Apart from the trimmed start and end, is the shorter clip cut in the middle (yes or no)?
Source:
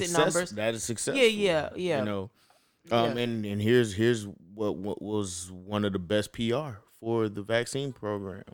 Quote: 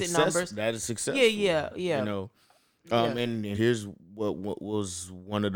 yes